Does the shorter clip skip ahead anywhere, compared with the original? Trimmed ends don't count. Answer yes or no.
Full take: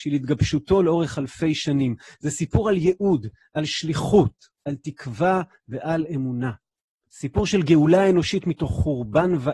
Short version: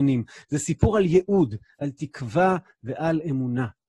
yes